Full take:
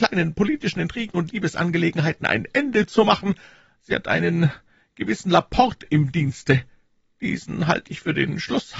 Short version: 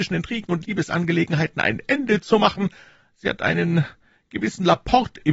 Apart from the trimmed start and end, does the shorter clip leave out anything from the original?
no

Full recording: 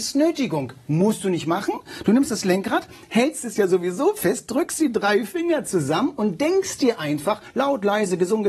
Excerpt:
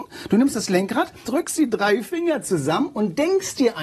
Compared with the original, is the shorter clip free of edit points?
no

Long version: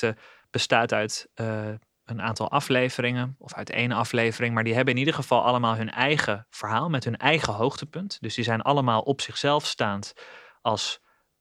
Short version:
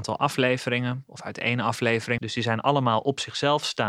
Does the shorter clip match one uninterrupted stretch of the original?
no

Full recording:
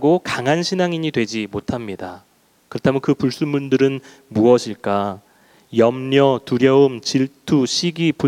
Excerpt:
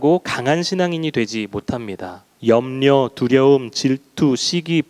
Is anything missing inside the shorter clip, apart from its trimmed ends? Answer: yes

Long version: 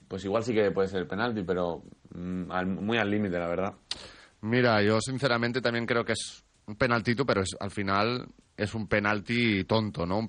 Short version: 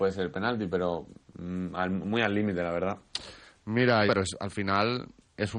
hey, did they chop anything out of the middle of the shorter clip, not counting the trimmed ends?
yes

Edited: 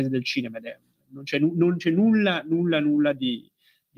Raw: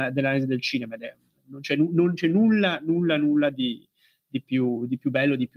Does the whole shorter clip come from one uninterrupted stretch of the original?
yes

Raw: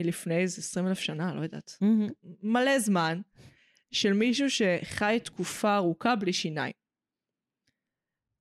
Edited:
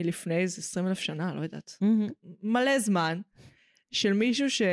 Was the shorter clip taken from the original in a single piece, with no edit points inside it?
yes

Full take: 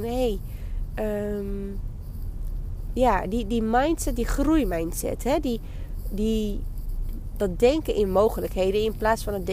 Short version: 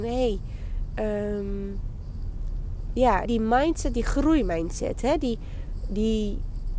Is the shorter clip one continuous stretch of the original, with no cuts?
no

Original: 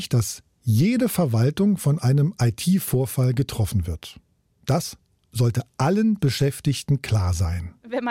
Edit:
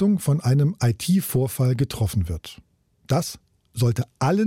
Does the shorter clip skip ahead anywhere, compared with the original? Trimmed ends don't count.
no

